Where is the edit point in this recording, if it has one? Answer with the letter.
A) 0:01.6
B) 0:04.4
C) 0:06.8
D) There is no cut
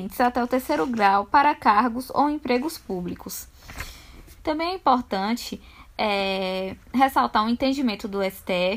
B